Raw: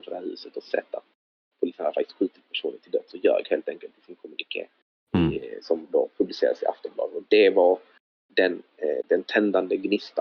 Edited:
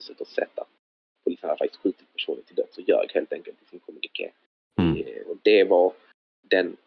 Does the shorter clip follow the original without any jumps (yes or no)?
no